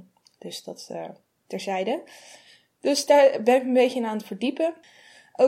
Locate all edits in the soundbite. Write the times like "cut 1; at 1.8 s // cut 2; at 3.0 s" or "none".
none